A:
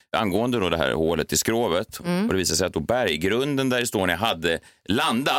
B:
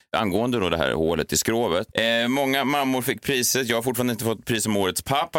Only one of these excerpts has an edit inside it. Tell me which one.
B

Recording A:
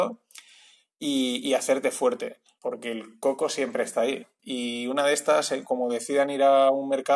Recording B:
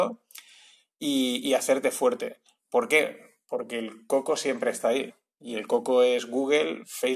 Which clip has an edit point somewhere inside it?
A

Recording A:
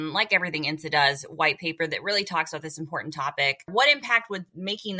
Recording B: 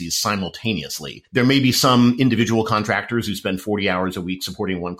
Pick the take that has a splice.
A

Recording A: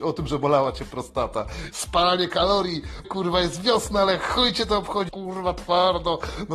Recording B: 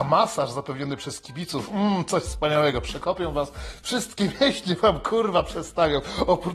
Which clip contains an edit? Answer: A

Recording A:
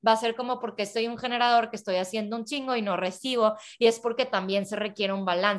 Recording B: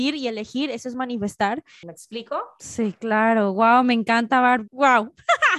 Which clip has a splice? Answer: B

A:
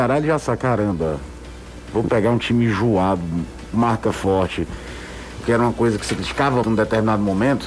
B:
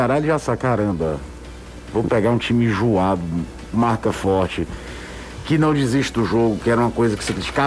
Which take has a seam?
A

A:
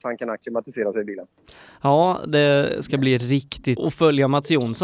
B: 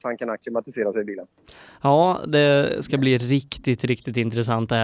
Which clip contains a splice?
A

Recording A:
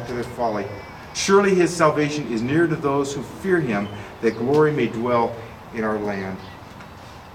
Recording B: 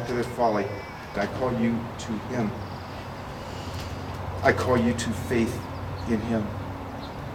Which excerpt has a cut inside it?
B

